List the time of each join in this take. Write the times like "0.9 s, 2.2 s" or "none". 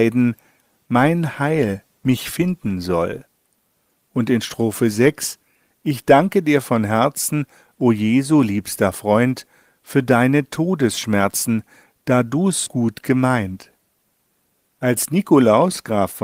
12.7 s

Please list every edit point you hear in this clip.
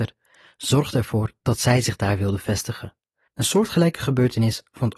3.3 s

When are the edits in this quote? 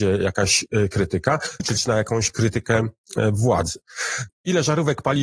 1.6 s, 4.3 s

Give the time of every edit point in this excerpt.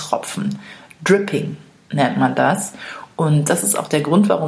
none

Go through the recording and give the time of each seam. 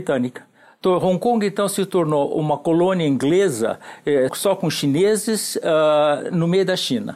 4.3 s

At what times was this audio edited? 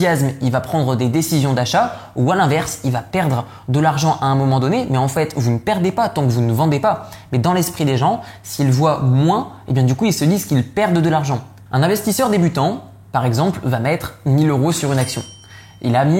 11.7 s

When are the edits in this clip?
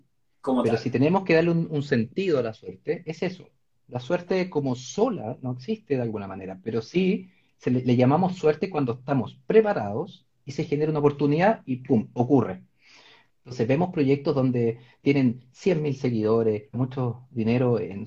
13.3 s, 16.7 s

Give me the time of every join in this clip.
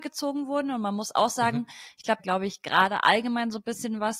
2.2 s

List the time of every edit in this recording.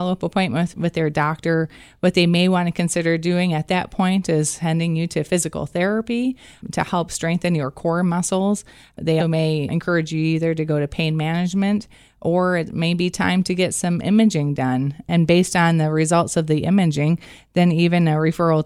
9.2 s

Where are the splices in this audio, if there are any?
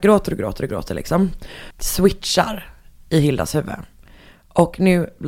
1.7 s

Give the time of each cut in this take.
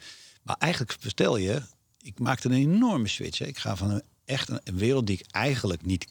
none

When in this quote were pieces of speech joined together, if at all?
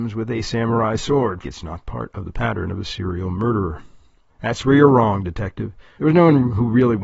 1.4 s, 4.3 s, 6.0 s

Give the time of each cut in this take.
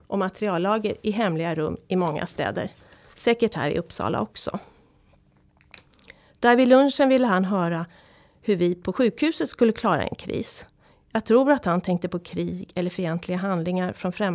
none

